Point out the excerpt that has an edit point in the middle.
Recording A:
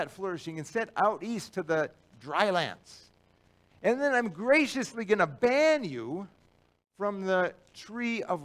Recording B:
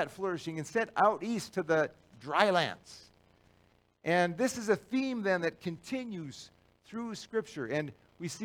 A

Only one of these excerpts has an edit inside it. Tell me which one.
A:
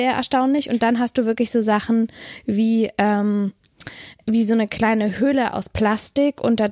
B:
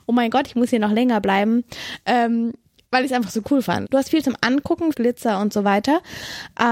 B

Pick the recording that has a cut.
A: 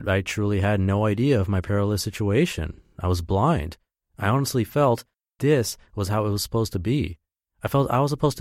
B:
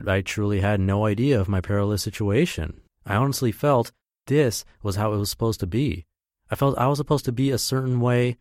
B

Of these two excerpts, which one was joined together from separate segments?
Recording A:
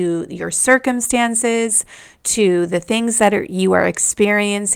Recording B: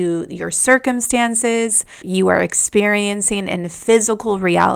B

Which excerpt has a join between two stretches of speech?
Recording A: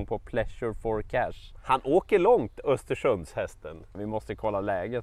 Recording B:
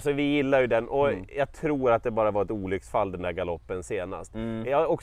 A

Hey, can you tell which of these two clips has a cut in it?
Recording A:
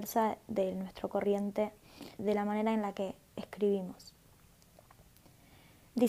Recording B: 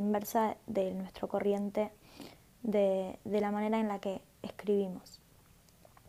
A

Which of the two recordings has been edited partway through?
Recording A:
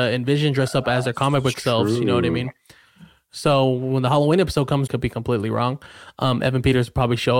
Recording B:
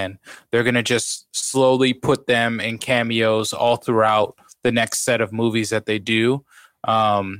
A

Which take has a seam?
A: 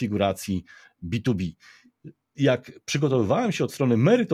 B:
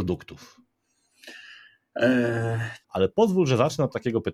B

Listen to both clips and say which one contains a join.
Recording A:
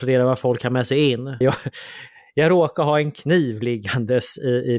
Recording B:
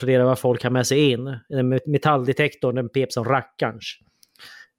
A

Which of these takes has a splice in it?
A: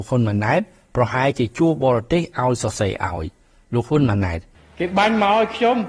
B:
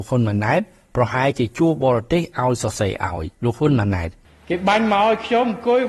B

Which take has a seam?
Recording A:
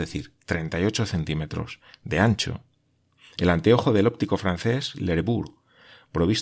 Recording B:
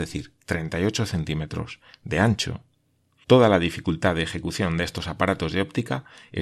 B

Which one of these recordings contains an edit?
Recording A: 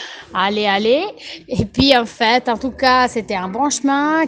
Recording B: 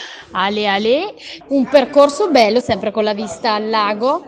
B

